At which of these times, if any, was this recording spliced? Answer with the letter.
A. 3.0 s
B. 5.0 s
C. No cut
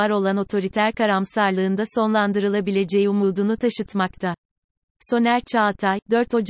C